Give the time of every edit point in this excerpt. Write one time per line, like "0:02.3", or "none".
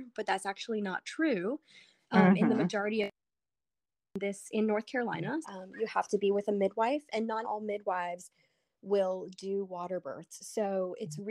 0:05.4
0:07.4